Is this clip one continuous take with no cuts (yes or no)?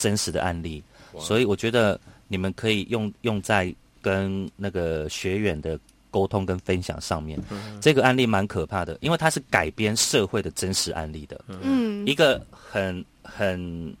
no